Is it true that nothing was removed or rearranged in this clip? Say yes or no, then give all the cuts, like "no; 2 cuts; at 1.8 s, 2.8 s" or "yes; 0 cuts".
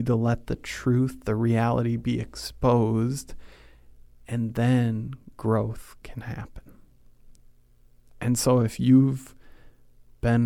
yes; 0 cuts